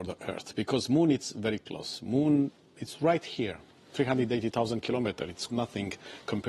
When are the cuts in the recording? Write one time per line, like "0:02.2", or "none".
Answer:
0:05.5